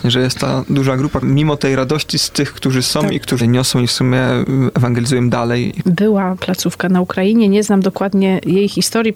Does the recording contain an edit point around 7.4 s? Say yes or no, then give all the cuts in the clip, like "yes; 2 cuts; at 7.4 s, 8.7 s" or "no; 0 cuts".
no; 3 cuts; at 1.2 s, 3.4 s, 5.8 s